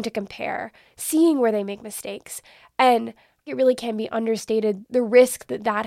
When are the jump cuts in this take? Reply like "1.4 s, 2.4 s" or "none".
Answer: none